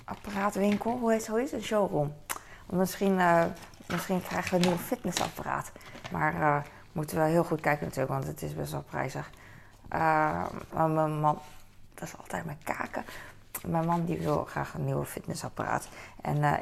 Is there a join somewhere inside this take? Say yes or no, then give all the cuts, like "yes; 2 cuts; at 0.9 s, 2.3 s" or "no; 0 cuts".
yes; 2 cuts; at 10.7 s, 11.9 s